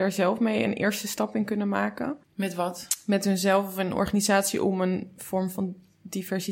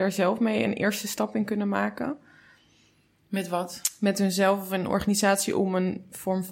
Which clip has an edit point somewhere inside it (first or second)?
first